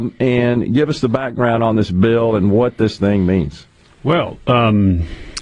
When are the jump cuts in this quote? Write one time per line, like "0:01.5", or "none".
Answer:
none